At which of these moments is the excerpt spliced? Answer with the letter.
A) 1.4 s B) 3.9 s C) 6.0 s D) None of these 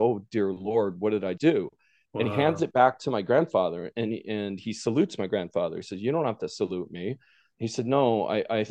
A